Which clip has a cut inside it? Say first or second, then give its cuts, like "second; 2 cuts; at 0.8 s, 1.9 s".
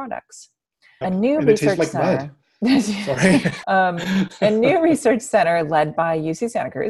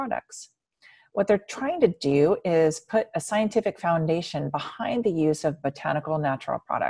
first; 2 cuts; at 1.0 s, 3.6 s